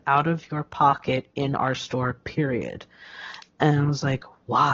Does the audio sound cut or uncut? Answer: uncut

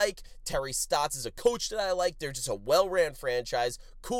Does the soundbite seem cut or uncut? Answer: uncut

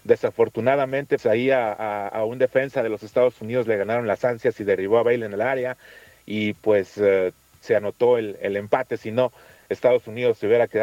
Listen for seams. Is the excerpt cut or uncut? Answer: cut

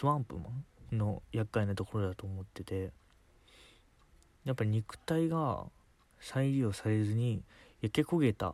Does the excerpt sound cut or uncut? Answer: uncut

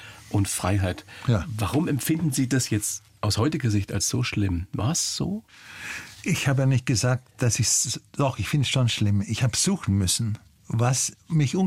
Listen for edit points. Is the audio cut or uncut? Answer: uncut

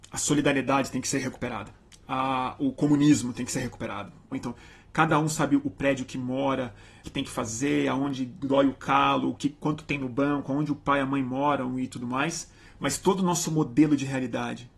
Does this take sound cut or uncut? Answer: cut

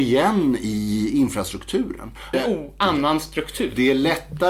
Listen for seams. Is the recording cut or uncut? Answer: cut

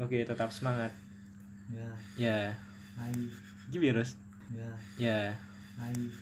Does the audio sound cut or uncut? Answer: cut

